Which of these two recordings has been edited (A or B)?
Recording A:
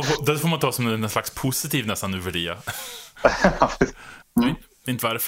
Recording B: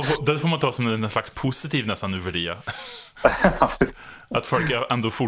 A